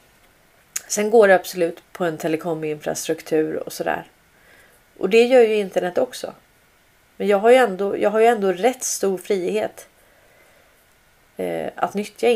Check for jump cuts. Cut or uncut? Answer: cut